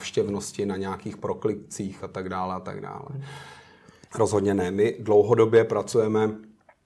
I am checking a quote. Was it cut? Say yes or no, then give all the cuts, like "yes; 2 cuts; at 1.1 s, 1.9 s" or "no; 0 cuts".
yes; 1 cut; at 4.1 s